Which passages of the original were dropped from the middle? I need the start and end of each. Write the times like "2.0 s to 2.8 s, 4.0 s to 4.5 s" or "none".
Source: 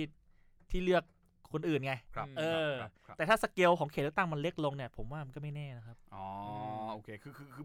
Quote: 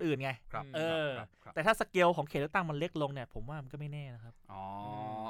none